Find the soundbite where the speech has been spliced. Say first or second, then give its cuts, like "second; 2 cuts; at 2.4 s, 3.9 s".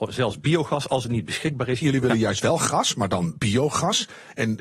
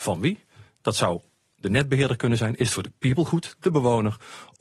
first; 1 cut; at 1.8 s